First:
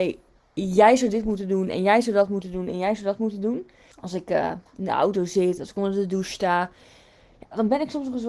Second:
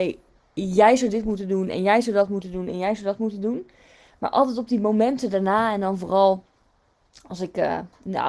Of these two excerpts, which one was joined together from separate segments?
first; 2 cuts; at 3.9 s, 5.6 s

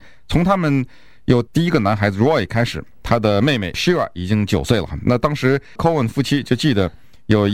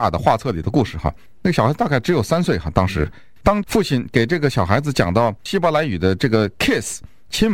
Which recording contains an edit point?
first; 1 cut; at 3.0 s

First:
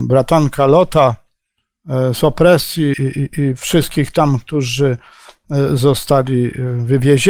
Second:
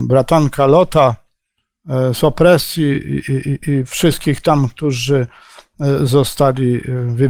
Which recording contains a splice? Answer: first; 1 cut; at 2.9 s

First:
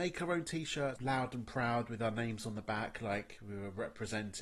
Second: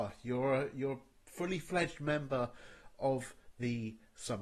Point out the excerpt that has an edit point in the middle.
first; 1 cut; at 1.0 s

